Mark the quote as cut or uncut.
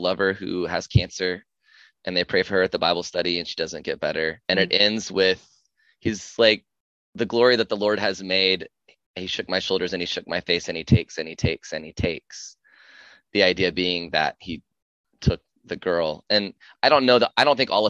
cut